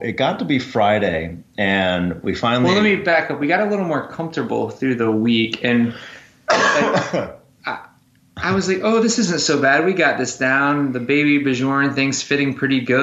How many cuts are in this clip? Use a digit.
0